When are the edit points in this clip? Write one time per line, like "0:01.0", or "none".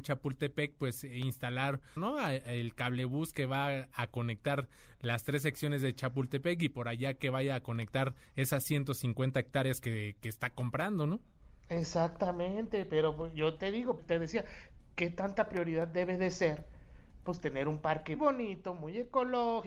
0:02.0
0:14.0
0:18.2